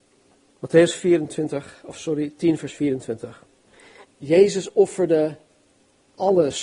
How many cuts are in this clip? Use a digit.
1